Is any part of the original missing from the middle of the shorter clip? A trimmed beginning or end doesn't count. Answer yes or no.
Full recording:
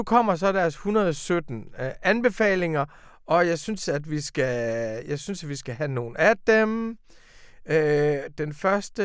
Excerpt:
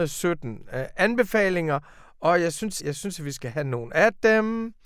yes